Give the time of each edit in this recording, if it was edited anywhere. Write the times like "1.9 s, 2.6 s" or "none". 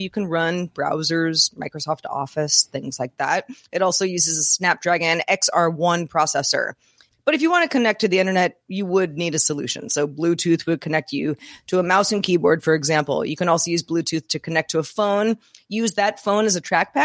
7.1 s